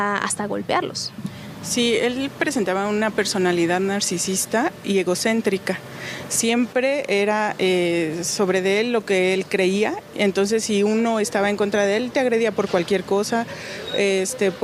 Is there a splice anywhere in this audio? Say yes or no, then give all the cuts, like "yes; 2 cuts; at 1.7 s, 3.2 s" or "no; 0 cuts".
no; 0 cuts